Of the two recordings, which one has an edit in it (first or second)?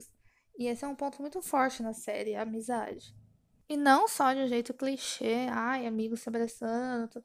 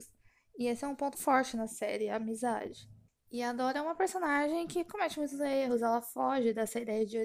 second